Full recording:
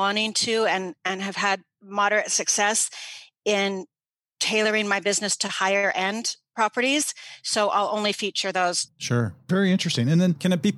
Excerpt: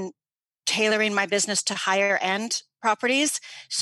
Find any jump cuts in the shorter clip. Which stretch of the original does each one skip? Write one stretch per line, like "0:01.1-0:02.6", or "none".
none